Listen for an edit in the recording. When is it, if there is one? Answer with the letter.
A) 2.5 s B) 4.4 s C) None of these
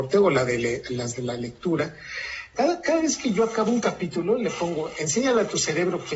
A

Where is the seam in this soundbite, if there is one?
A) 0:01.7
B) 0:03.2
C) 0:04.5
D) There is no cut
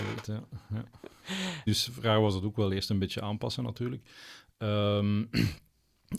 A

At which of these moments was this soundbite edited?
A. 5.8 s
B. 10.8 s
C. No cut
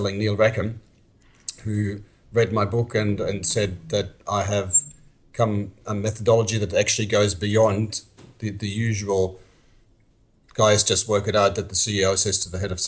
A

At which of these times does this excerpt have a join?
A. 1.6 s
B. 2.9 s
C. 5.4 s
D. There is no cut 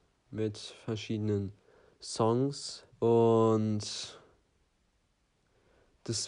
B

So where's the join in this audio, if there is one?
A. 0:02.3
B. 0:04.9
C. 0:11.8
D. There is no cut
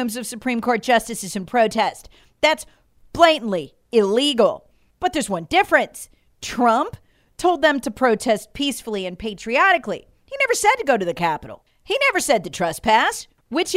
B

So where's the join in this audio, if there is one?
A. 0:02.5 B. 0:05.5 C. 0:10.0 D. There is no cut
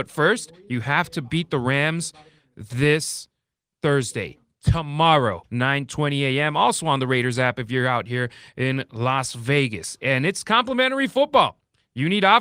B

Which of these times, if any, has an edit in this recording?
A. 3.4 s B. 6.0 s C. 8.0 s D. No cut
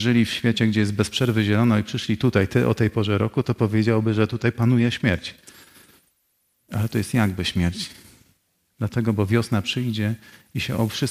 D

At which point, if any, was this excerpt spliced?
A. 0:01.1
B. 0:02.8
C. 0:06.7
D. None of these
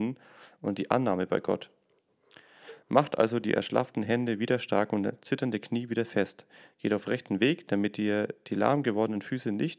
D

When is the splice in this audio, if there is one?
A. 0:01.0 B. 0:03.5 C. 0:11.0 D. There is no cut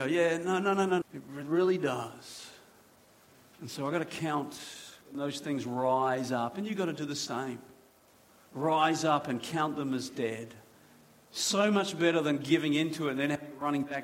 A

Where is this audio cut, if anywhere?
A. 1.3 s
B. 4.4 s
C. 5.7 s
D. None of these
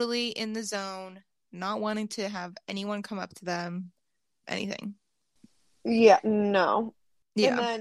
B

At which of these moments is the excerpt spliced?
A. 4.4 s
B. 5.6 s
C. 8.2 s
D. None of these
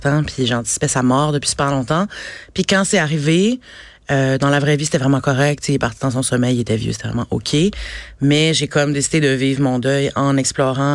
D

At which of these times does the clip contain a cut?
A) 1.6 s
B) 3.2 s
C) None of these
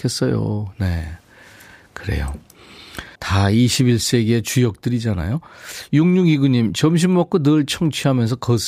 B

